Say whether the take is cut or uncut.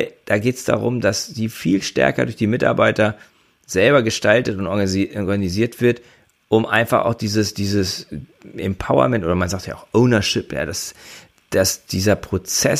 uncut